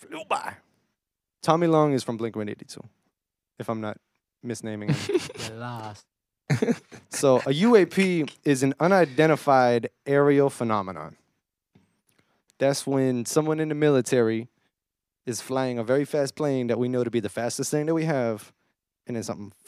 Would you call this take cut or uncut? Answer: cut